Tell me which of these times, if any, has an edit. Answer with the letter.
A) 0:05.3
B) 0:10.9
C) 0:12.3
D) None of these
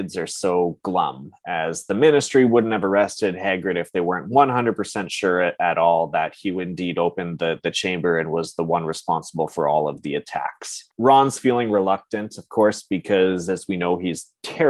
B